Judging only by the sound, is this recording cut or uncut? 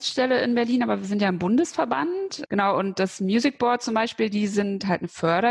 uncut